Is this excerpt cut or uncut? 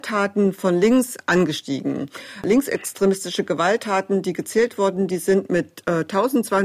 uncut